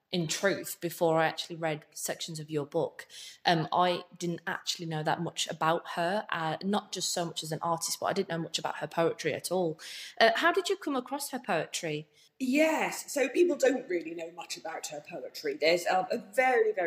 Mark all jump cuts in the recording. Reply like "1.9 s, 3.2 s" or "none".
12.3 s